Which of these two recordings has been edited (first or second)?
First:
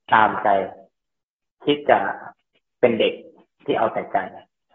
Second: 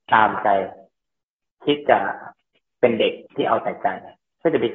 second